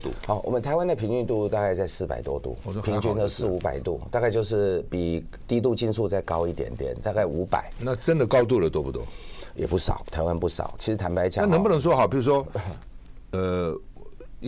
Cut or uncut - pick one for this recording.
uncut